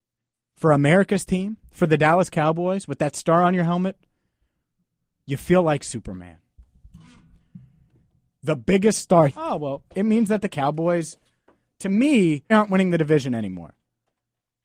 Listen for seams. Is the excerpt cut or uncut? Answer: cut